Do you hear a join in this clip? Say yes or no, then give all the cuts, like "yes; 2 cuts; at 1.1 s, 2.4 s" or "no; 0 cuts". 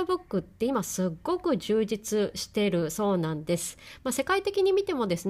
no; 0 cuts